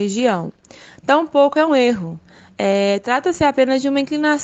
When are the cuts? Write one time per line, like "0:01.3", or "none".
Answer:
0:01.7